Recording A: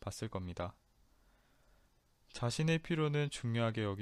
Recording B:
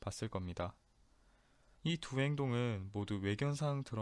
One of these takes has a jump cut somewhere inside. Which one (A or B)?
B